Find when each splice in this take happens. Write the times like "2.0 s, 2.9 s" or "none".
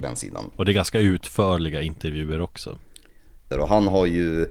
3.5 s